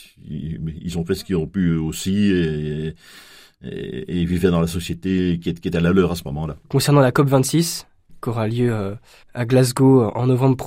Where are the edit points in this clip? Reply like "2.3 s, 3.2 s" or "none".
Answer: 6.6 s

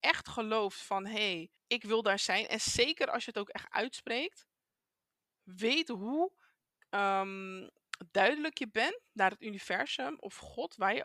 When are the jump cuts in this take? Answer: 1.6 s

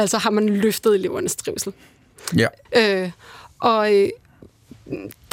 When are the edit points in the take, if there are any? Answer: 2.7 s

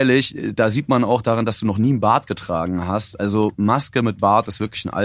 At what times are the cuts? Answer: none

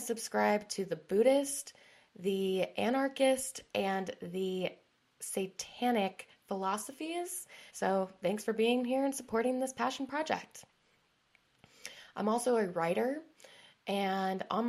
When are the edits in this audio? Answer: 7.7 s

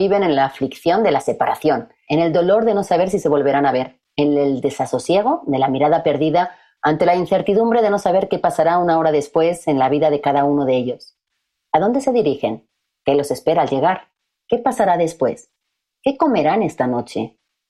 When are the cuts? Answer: 2.0 s

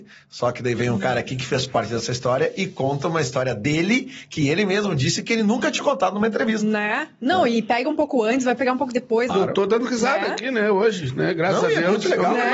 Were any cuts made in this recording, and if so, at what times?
9.3 s

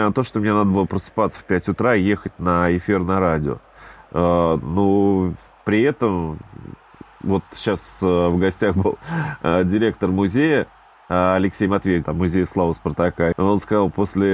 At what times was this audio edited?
12.0 s, 13.3 s

